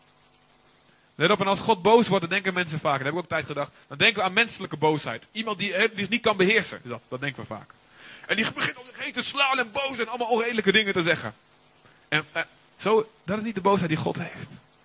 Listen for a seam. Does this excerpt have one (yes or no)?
no